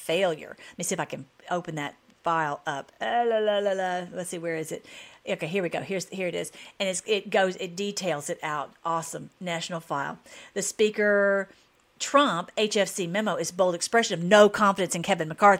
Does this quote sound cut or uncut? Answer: uncut